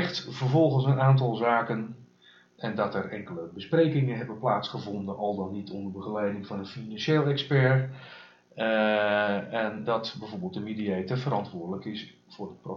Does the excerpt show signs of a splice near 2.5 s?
yes; 3 cuts; at 2.5 s, 8.5 s, 9.9 s

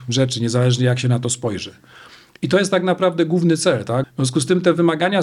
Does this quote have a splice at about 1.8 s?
no; 1 cut; at 4.0 s

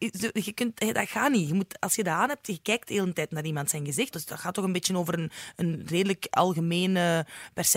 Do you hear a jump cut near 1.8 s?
no; 1 cut; at 4.1 s

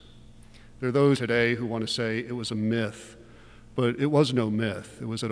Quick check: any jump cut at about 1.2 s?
yes; 1 cut; at 1.2 s

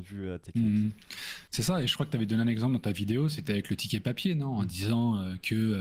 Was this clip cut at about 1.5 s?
yes; 1 cut; at 1.5 s

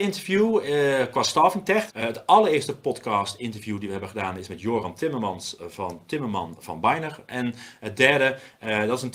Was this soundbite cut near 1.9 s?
yes; 1 cut; at 1.9 s

